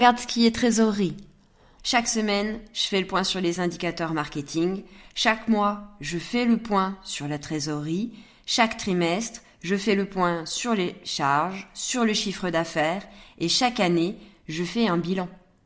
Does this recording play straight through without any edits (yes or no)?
no